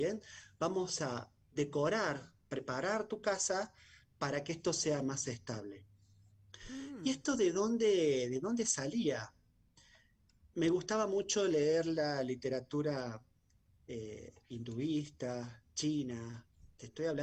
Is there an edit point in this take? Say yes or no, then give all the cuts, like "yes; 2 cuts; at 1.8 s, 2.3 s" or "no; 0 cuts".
no; 0 cuts